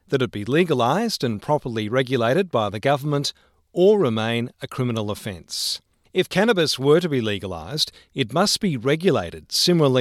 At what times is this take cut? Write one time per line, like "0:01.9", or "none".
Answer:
none